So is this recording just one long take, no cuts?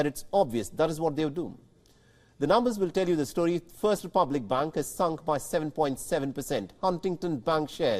yes; 0 cuts

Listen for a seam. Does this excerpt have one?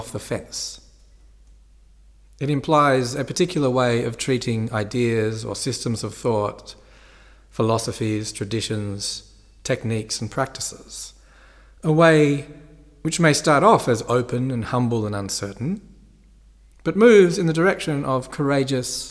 no; 0 cuts

